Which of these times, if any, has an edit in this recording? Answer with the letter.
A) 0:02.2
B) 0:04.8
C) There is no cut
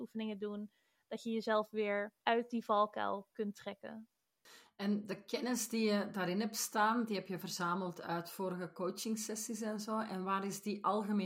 A